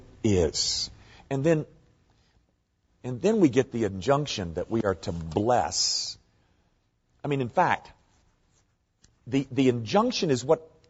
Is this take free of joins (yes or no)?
yes